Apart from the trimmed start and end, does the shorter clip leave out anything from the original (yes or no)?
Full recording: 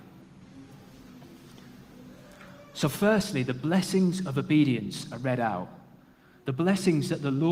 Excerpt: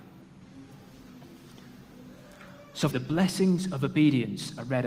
yes